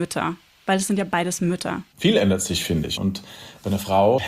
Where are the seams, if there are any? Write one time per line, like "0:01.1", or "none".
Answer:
0:03.0

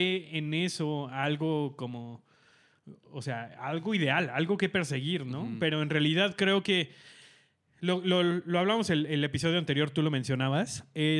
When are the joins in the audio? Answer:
none

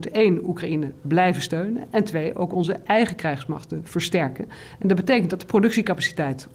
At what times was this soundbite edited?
none

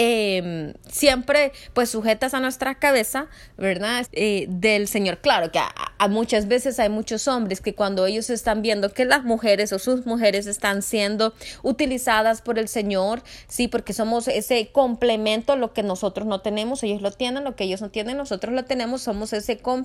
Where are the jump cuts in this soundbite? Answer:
0:04.0

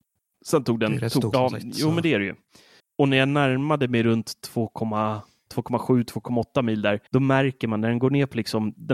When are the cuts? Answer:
0:01.3
0:02.8
0:07.1

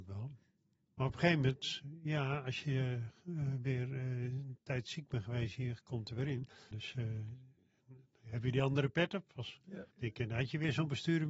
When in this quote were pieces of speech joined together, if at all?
0:06.7
0:09.9

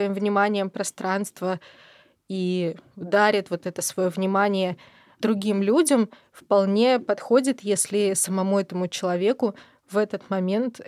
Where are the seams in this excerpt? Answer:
none

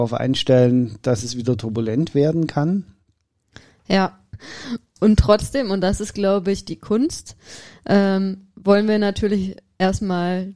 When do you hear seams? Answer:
0:04.3

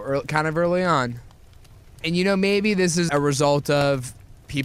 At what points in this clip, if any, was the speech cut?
0:02.0
0:03.1

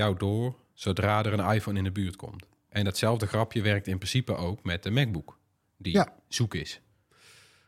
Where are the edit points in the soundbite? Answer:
0:02.6

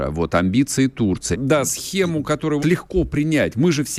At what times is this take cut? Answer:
0:01.3
0:02.6

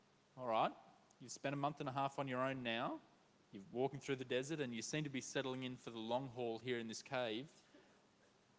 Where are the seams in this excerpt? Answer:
none

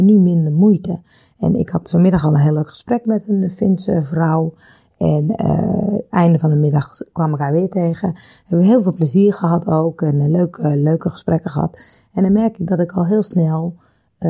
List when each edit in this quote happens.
none

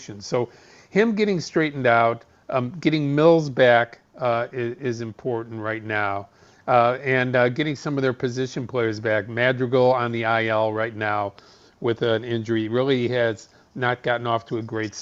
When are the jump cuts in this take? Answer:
none

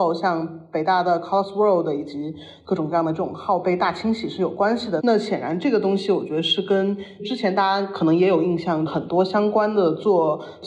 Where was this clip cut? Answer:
0:05.0
0:08.9

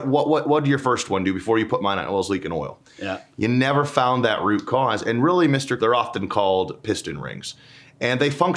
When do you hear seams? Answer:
0:05.8

